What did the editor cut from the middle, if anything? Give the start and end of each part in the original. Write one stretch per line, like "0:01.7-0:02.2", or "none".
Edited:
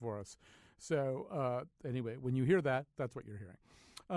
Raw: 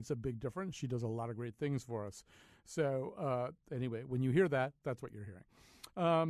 none